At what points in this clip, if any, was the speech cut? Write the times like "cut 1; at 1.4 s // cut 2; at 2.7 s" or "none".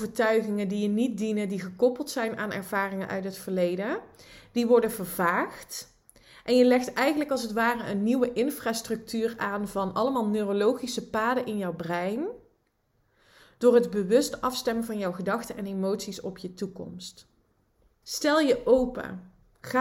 cut 1; at 18.0 s